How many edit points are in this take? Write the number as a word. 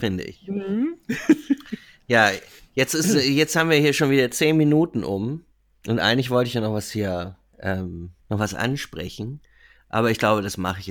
one